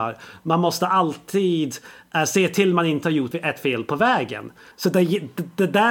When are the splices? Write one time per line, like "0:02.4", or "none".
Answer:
0:03.3
0:04.7